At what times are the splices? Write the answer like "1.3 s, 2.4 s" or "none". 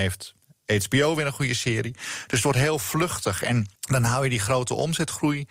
3.8 s